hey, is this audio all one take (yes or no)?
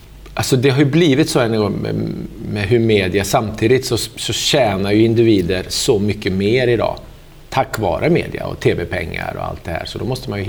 yes